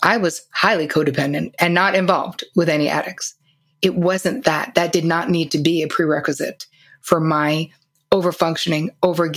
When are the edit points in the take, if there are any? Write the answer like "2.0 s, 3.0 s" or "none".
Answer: none